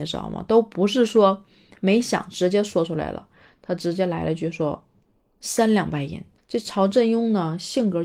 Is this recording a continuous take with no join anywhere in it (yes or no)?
no